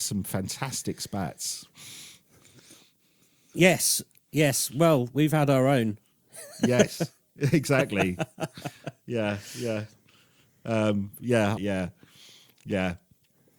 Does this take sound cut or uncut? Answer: cut